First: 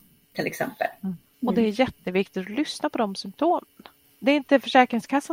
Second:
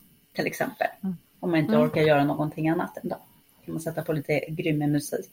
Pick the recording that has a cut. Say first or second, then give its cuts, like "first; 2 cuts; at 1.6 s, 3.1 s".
first; 2 cuts; at 1.3 s, 4.0 s